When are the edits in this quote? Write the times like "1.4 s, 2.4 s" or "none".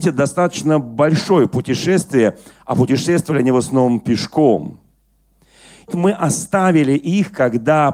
5.9 s